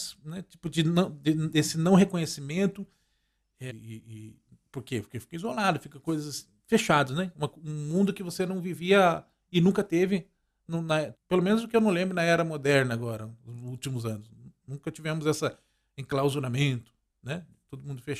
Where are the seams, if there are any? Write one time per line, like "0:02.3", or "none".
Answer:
0:03.7
0:11.1